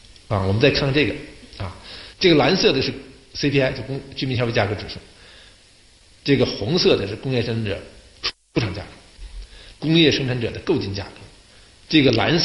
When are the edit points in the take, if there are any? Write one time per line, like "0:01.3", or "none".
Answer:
0:02.1
0:09.7